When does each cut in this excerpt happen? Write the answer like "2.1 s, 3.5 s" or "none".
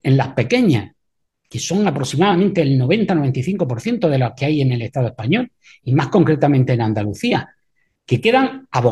none